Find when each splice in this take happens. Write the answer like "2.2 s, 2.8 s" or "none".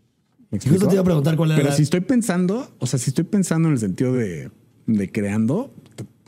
none

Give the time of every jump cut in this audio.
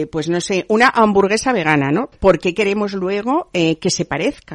2.1 s

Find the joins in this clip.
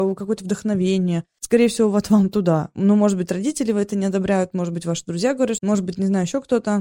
5.6 s

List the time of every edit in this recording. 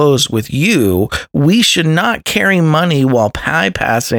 none

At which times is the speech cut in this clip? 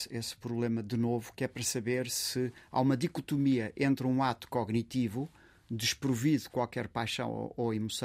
none

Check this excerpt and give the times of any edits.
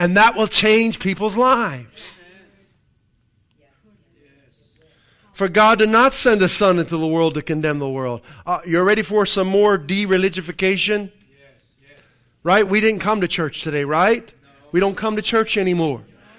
none

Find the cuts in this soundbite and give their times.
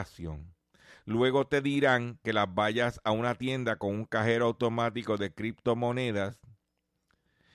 none

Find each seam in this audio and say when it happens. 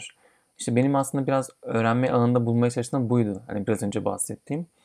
none

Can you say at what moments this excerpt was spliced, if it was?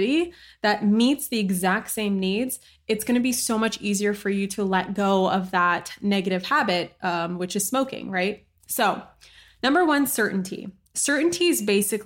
none

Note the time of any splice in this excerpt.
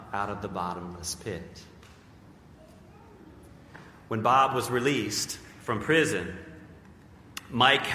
none

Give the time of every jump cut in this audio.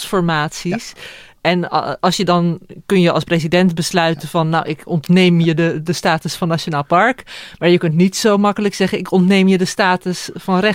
none

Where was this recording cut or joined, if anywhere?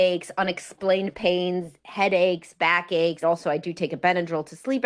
3.2 s

